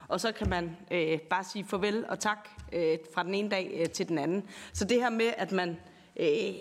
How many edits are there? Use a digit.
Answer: 0